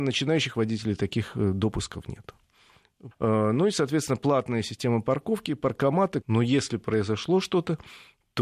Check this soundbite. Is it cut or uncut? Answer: cut